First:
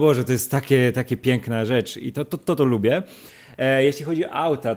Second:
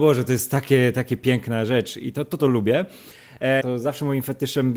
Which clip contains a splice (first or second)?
second